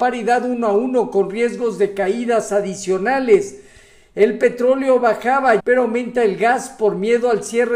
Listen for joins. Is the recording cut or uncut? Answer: cut